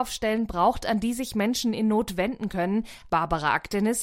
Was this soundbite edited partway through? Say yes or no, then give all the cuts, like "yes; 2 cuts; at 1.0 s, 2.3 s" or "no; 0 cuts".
yes; 1 cut; at 3.1 s